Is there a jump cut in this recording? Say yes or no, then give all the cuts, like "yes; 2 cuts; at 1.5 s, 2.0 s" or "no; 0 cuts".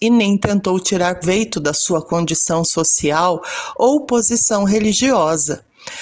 yes; 1 cut; at 1.2 s